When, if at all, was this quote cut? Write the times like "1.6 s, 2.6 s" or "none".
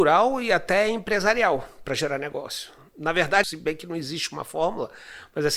3.4 s